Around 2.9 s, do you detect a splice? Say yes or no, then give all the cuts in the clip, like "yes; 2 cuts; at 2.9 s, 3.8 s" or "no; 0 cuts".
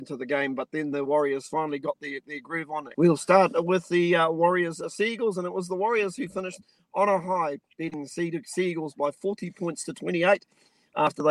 yes; 1 cut; at 2.9 s